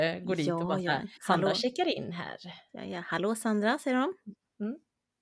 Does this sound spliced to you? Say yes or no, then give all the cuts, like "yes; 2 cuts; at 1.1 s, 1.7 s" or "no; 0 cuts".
yes; 1 cut; at 1.2 s